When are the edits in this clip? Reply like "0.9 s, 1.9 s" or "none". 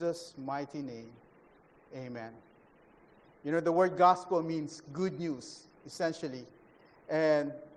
none